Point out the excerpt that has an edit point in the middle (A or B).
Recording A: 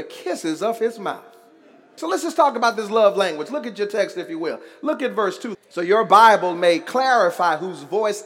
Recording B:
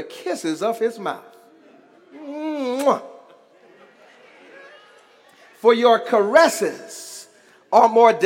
A